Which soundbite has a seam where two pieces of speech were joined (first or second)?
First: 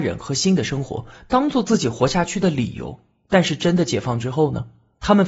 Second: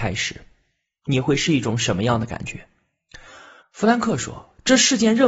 second